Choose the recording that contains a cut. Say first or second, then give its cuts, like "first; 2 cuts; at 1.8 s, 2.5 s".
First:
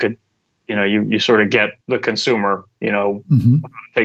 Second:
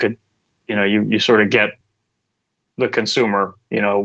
first; 1 cut; at 1.8 s